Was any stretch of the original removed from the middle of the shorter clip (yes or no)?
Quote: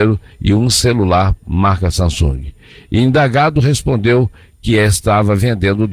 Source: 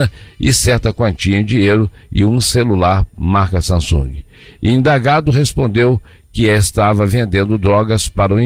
no